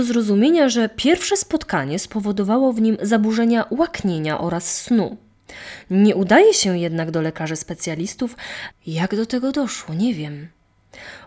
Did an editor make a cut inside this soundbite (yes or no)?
yes